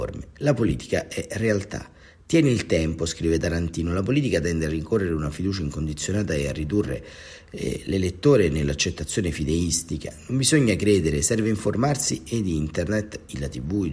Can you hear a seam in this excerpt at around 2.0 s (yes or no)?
no